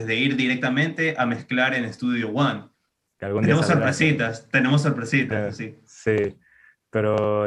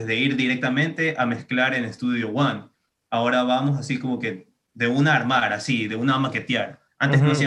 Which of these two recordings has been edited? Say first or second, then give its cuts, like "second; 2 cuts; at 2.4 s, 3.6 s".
first; 1 cut; at 3.1 s